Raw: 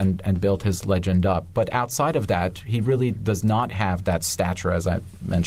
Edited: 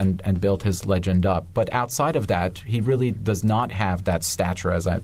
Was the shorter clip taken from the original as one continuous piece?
yes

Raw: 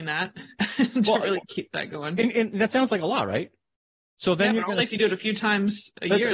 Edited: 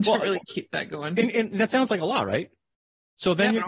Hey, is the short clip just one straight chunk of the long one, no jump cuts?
yes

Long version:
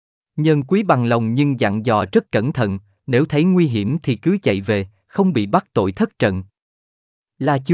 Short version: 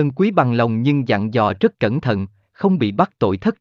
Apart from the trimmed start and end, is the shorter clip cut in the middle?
yes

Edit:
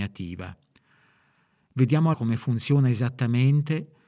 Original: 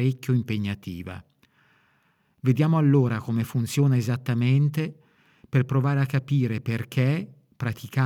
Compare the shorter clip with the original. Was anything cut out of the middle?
yes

